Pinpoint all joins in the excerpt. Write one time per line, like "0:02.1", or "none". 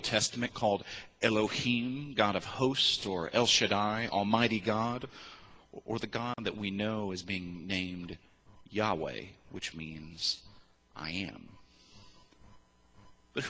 none